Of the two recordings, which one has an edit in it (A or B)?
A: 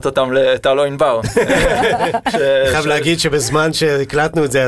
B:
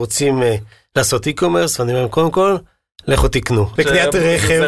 B